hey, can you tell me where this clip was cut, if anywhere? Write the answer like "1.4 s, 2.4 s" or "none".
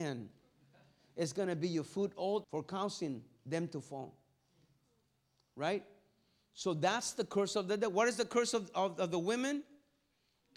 2.4 s